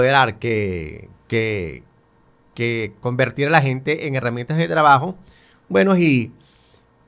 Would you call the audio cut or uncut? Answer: uncut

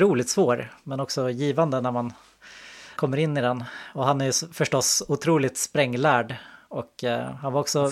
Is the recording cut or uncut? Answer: cut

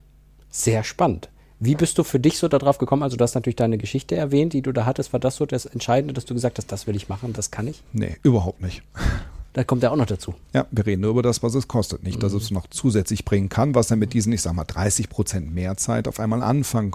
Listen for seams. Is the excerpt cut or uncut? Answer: cut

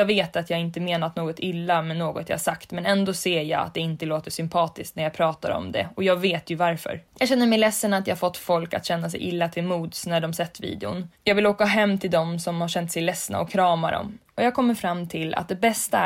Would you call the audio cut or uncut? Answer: cut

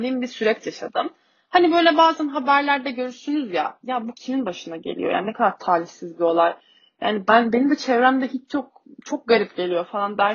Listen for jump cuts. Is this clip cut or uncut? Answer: uncut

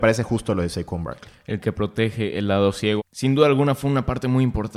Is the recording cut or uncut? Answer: cut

